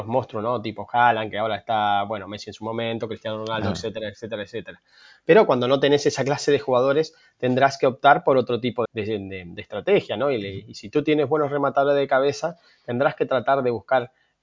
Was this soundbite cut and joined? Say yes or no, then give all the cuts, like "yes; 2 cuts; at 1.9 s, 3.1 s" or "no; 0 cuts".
yes; 1 cut; at 8.9 s